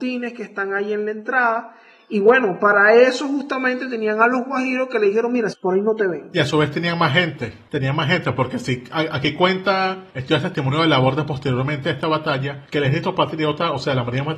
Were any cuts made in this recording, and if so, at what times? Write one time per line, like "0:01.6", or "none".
0:05.5